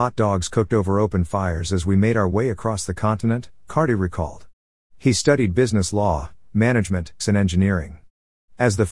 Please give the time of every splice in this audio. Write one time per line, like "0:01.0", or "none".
0:04.9
0:07.2